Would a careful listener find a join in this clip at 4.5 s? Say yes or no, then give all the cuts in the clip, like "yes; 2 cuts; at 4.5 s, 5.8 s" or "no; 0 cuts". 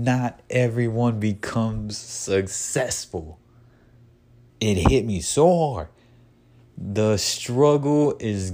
yes; 1 cut; at 4.5 s